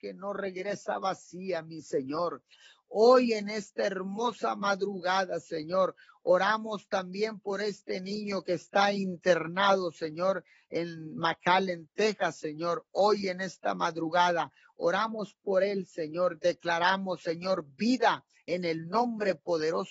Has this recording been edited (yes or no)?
no